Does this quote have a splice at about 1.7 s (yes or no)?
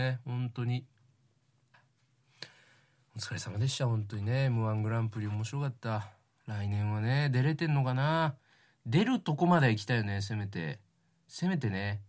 yes